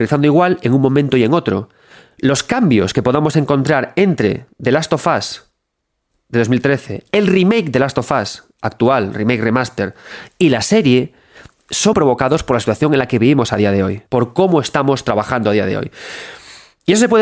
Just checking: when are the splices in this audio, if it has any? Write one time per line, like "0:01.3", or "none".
0:11.9
0:14.1